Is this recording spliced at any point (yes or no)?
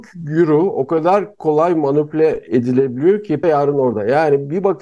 yes